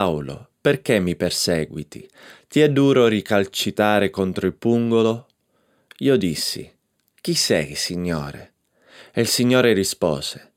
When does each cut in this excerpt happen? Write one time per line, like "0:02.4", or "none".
none